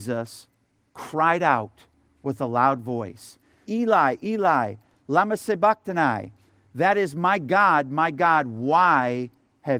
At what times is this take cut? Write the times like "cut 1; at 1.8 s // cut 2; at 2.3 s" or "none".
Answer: cut 1; at 3.6 s